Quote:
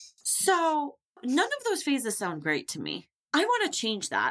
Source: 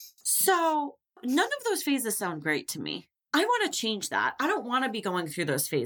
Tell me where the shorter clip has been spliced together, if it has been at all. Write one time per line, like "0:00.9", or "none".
none